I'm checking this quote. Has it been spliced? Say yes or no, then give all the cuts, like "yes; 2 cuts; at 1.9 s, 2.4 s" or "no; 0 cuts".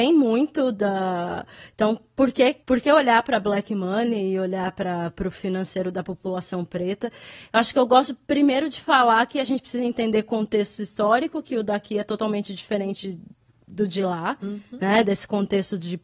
yes; 1 cut; at 2.6 s